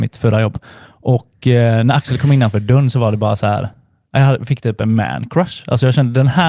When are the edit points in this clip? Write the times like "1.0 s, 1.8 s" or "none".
none